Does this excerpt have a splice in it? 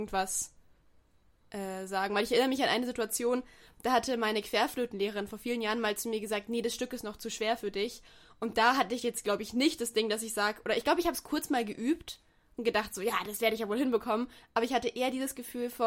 no; 0 cuts

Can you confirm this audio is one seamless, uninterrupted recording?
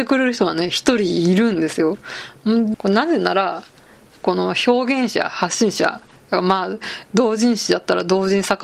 no; 1 cut; at 2.7 s

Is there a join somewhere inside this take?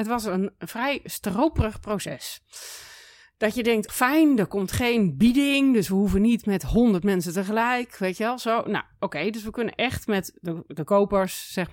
yes; 1 cut; at 3.9 s

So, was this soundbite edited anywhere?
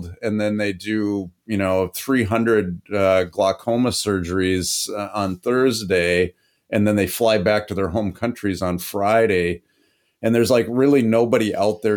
no; 0 cuts

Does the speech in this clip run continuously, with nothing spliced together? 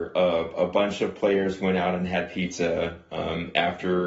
yes; 0 cuts

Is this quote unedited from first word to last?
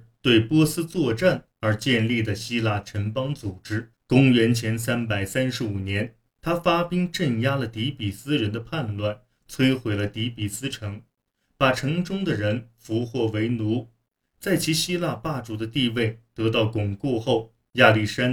yes; 0 cuts

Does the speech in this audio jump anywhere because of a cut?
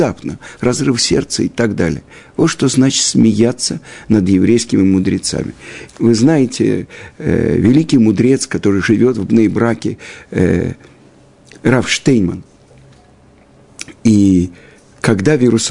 yes; 1 cut; at 5.9 s

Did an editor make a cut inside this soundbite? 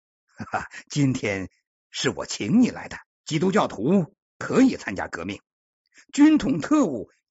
yes; 1 cut; at 3.1 s

